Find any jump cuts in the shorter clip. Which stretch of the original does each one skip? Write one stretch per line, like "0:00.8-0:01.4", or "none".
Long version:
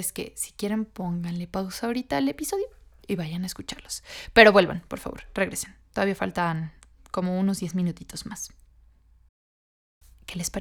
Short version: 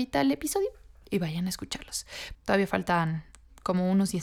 0:04.3-0:05.8